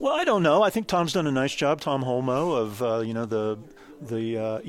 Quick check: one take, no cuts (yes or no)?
yes